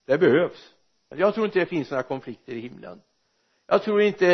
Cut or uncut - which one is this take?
cut